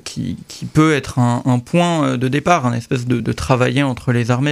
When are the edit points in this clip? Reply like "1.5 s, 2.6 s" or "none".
3.2 s